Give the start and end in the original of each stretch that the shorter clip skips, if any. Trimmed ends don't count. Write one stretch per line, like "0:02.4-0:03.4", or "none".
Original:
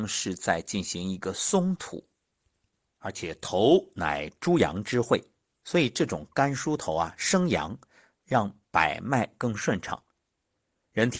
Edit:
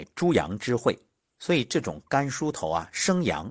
none